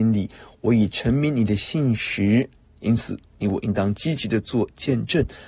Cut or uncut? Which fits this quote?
cut